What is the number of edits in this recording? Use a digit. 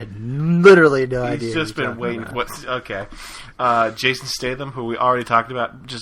2